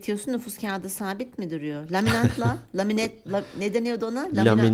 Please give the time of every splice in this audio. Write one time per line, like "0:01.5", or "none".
none